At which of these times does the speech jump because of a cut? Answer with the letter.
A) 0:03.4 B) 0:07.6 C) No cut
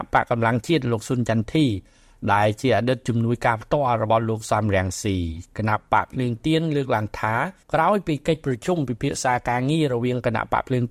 B